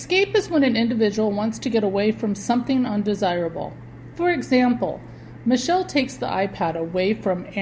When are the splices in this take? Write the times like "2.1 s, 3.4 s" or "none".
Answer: 4.1 s

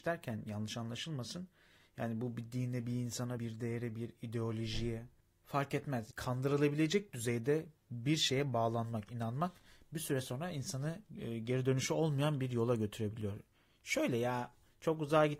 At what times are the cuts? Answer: 3.4 s

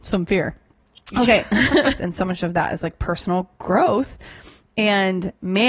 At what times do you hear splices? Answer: 2.0 s

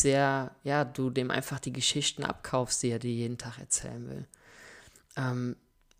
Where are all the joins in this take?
none

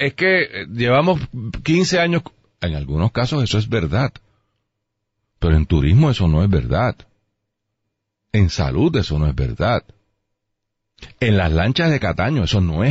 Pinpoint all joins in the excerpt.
none

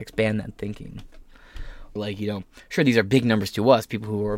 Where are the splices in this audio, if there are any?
2.0 s

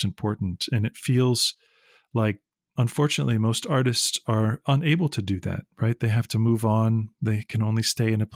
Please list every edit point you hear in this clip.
none

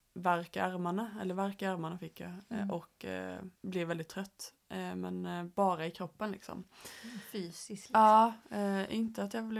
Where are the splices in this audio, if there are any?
3.6 s

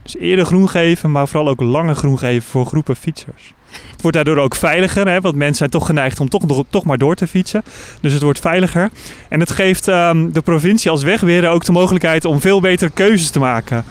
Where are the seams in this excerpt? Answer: 3.9 s

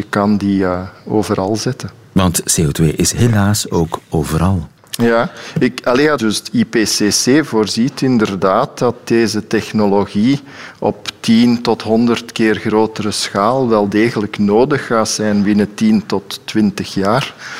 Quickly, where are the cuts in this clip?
4.8 s, 6.2 s

